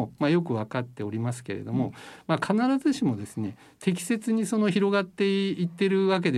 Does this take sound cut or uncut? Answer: uncut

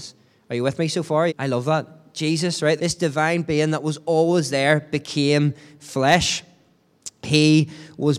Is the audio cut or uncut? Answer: cut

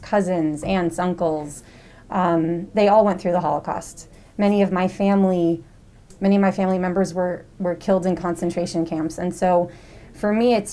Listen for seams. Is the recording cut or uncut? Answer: uncut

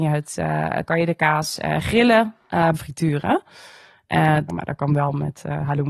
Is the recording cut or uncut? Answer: cut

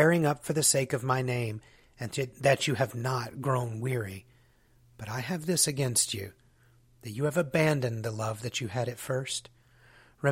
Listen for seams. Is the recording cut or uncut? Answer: uncut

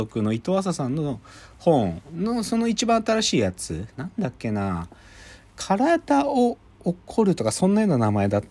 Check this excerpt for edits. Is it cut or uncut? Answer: uncut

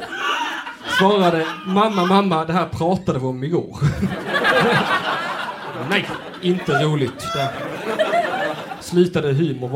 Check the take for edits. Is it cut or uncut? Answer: uncut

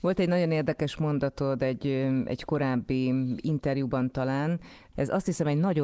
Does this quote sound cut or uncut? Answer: cut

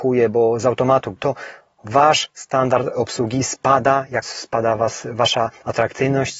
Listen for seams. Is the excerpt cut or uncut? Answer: cut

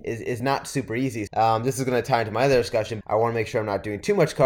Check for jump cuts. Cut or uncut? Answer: cut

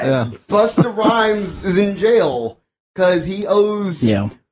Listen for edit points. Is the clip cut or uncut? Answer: uncut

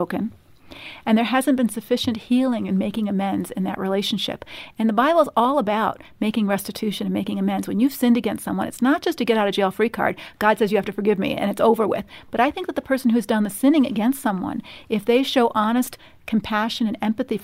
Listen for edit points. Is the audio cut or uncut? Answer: uncut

